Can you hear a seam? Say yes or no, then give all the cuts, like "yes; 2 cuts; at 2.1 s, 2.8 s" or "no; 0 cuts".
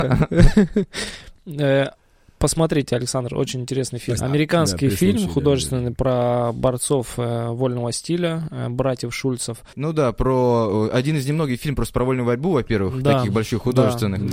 yes; 1 cut; at 4.2 s